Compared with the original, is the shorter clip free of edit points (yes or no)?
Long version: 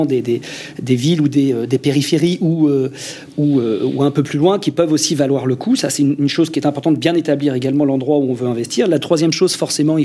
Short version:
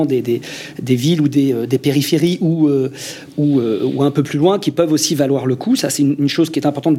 yes